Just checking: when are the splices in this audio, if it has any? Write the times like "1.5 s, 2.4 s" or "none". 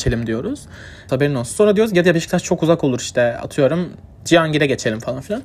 1.1 s, 4.3 s